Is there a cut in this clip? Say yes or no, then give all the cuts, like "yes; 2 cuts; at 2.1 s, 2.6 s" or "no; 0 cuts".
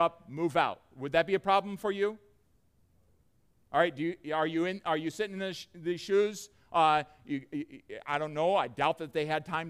no; 0 cuts